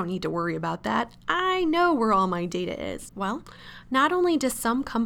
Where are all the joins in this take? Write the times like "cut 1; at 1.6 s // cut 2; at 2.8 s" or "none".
cut 1; at 3.1 s